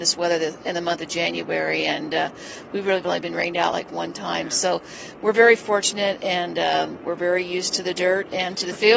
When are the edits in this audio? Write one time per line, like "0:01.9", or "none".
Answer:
none

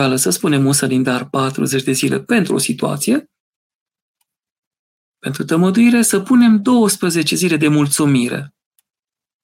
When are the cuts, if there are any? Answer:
none

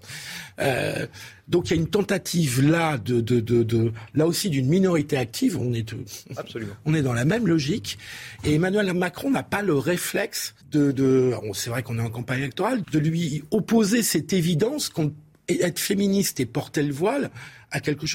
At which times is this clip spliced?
0:10.6
0:12.8

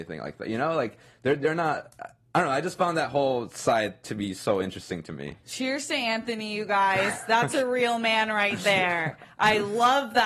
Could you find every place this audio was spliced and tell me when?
none

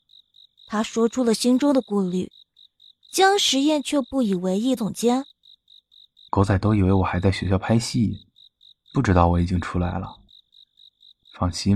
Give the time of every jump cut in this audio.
0:04.8

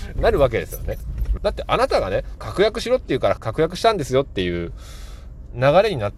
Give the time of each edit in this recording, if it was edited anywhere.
0:01.4
0:02.4
0:03.4

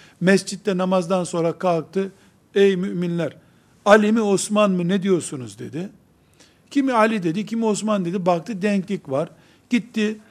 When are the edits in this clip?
none

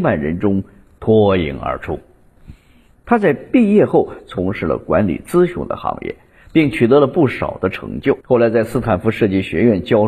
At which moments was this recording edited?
0:02.9
0:08.2

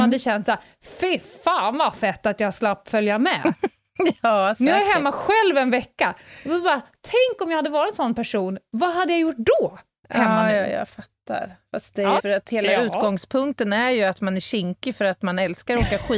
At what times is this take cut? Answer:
0:12.2

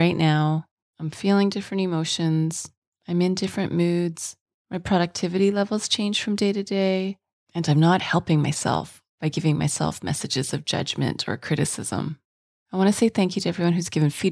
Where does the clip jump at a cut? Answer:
none

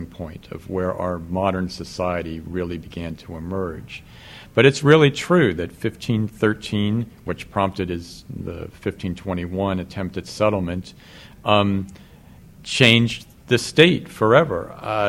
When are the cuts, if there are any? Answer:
none

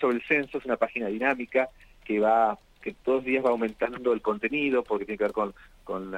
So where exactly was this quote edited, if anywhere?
0:02.8

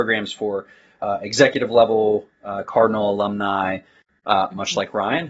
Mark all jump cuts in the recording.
none

